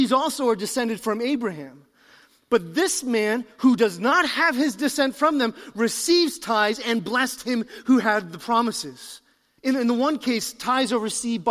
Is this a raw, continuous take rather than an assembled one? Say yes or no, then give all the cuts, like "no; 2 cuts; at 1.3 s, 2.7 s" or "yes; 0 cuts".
no; 1 cut; at 9.6 s